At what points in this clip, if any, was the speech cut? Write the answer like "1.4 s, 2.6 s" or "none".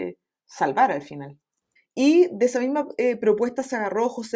1.8 s